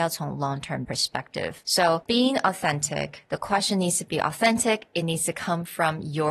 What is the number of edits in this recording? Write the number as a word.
one